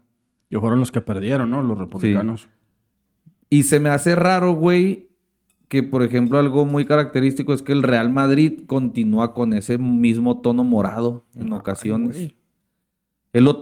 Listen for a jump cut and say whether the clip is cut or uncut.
uncut